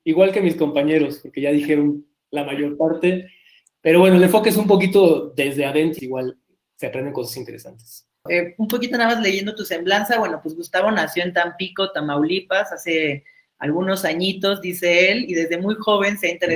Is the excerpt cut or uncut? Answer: cut